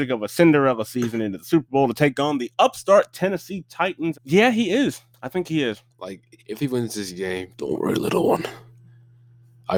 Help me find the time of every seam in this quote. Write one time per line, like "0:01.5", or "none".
0:04.1
0:05.9
0:07.5